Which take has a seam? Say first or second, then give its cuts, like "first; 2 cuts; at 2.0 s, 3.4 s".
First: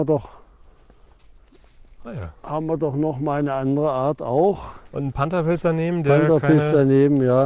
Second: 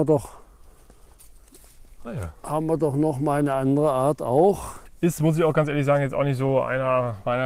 second; 1 cut; at 4.9 s